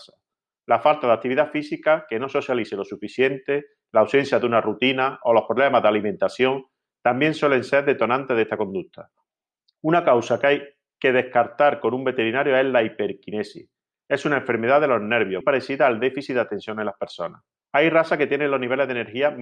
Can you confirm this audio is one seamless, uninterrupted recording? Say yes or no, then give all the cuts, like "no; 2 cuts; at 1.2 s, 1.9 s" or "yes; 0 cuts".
no; 2 cuts; at 15.4 s, 17.6 s